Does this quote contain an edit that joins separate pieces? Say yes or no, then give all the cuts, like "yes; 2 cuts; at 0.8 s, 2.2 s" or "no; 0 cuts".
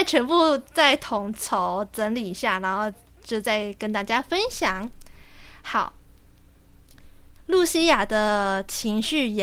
yes; 1 cut; at 7.4 s